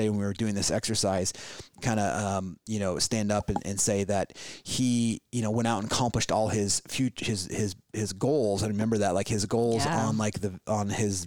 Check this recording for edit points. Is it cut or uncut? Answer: uncut